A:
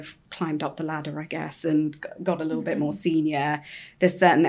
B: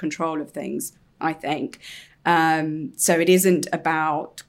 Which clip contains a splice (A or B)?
B